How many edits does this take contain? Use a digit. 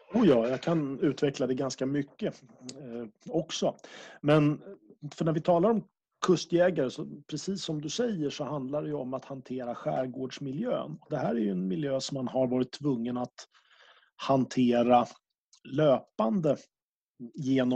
0